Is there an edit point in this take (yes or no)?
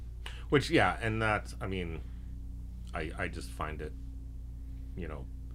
no